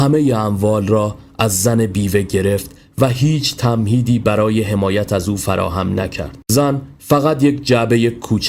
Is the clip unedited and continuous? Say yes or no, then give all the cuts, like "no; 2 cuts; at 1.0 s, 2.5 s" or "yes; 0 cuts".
no; 1 cut; at 6.4 s